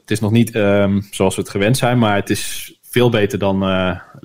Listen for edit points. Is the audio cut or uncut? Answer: uncut